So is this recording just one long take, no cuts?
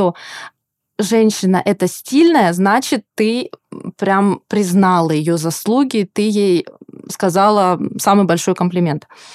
yes; 0 cuts

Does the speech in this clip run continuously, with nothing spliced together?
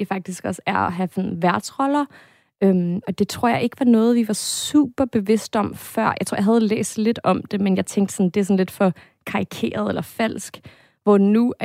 yes; 0 cuts

